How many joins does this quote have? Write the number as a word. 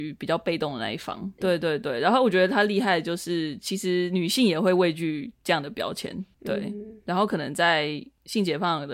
one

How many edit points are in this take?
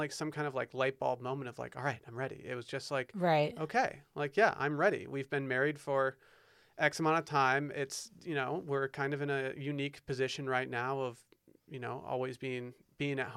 zero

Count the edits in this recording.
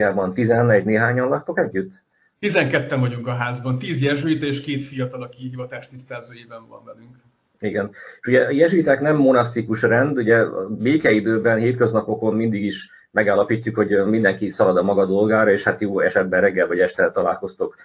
zero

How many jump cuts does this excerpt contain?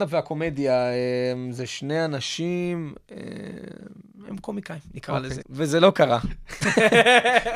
one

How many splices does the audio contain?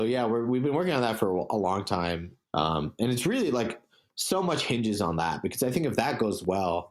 one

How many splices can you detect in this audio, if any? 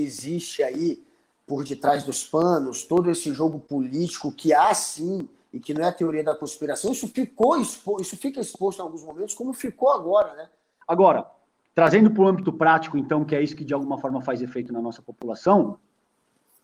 one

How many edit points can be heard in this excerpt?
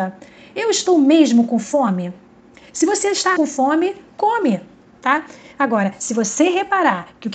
one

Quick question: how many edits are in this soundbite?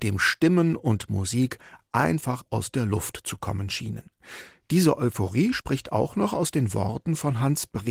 zero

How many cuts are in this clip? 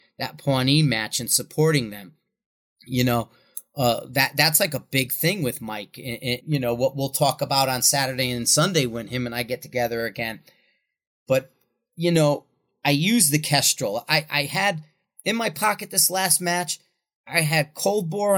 one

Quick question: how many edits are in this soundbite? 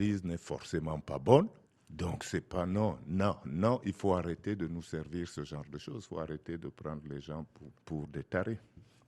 two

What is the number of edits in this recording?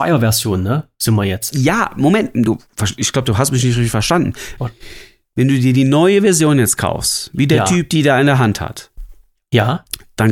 one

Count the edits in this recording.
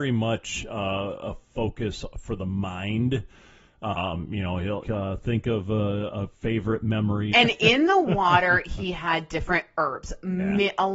two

